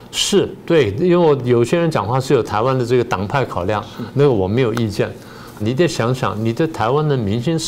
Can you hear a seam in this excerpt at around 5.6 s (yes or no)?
yes